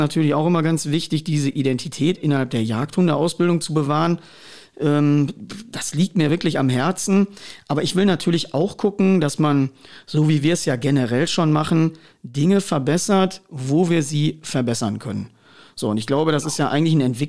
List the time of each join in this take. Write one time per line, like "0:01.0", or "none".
none